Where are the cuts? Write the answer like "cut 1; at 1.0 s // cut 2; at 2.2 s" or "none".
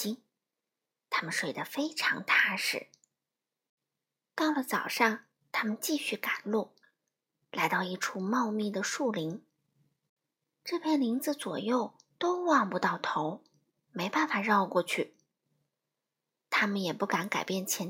none